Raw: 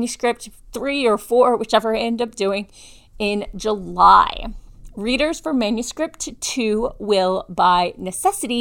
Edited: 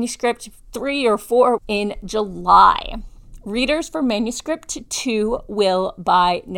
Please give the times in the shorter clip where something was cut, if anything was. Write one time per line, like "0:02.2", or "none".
0:01.6